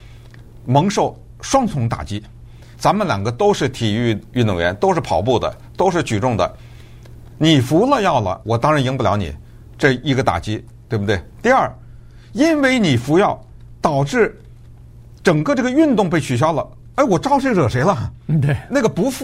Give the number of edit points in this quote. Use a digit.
2